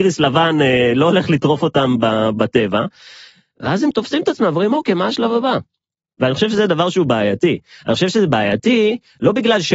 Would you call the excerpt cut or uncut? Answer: uncut